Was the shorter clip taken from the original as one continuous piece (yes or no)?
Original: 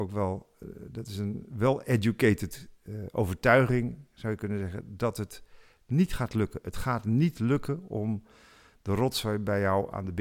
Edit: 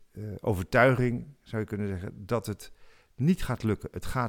yes